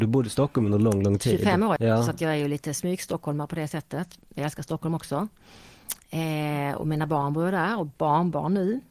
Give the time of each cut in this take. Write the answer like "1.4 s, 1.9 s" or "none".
1.8 s